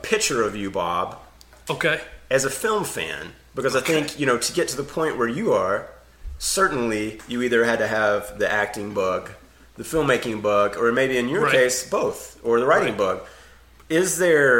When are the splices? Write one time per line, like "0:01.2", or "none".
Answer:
none